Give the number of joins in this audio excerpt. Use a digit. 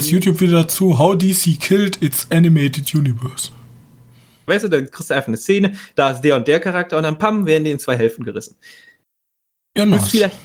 1